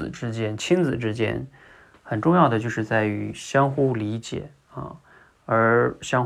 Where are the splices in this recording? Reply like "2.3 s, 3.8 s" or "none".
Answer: none

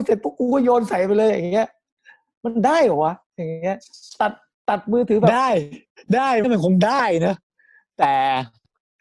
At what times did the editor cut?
6.4 s

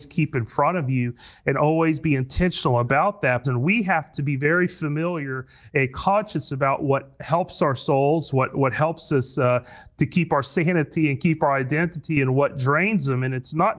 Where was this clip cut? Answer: 3.4 s

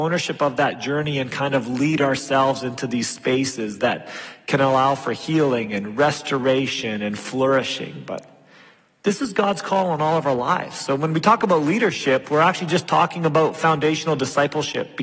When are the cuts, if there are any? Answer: none

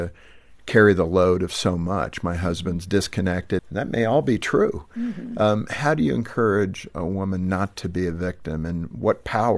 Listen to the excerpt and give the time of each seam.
3.6 s

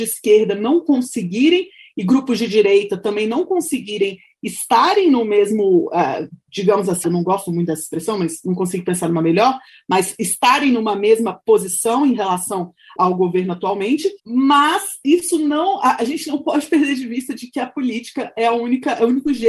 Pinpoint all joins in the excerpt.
7.0 s, 13.0 s, 14.2 s

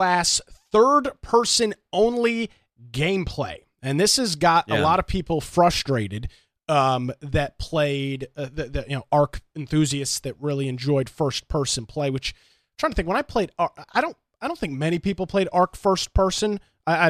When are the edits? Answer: 13.8 s

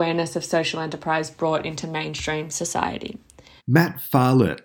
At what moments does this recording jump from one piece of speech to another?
3.6 s

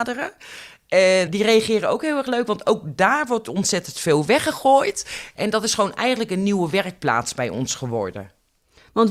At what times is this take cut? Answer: 1.3 s, 5.3 s

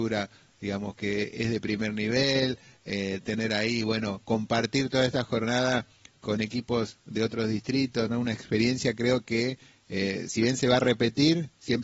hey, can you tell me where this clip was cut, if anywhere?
none

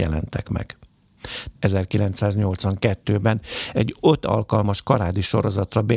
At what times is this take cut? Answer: 1.6 s

